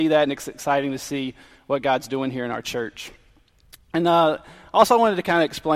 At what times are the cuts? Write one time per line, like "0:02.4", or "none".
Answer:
none